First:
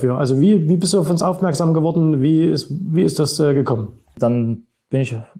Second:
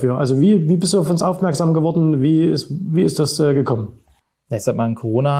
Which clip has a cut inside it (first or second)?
first